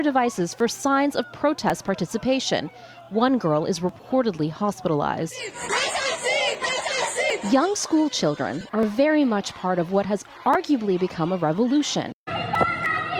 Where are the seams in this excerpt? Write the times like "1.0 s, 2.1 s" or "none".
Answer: none